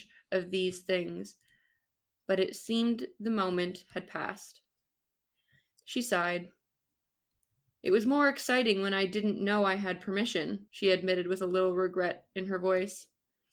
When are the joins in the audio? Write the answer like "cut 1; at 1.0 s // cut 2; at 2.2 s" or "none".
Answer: cut 1; at 5.7 s // cut 2; at 10.7 s